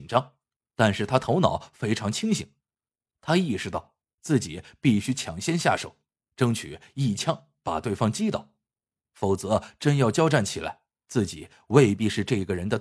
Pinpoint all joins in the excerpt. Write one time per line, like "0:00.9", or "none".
none